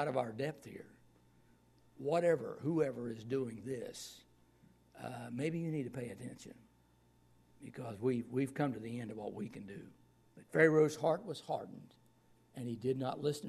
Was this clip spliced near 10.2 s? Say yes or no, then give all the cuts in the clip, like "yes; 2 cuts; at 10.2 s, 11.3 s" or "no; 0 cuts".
yes; 1 cut; at 10.2 s